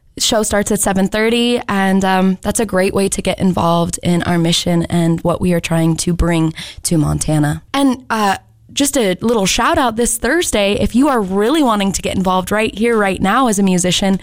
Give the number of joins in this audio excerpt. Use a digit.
1